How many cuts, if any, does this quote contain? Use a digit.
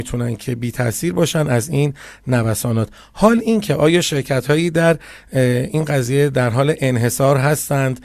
0